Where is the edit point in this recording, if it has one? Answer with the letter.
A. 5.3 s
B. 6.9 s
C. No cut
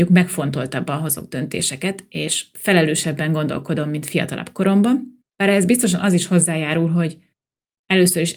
A